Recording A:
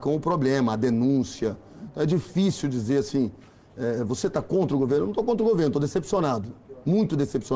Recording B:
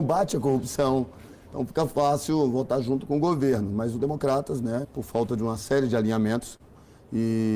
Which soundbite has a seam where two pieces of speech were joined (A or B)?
B